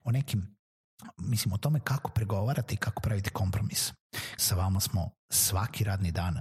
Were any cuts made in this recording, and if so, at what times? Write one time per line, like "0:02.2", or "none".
0:04.4